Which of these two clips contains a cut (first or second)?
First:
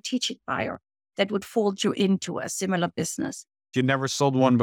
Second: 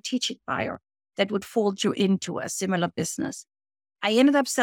first